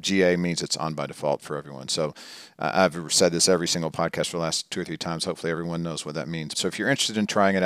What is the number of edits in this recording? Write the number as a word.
one